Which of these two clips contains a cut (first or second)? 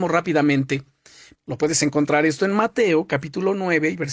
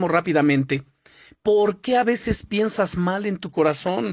first